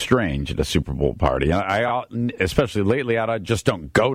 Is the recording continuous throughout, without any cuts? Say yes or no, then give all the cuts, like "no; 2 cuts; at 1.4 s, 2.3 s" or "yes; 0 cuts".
yes; 0 cuts